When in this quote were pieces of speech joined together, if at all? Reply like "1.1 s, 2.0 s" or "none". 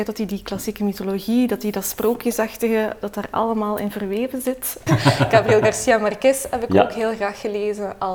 4.9 s